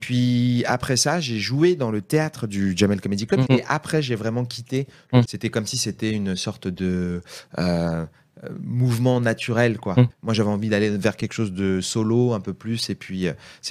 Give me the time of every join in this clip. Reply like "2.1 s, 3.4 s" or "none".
3.5 s, 5.2 s, 10.1 s